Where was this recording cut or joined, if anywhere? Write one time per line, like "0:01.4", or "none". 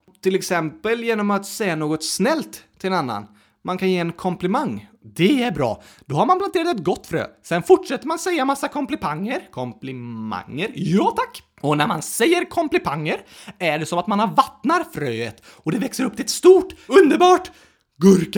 0:16.9